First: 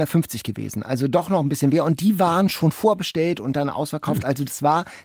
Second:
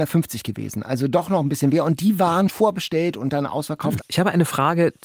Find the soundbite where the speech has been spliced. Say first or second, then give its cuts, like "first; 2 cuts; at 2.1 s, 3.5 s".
second; 2 cuts; at 2.5 s, 4.0 s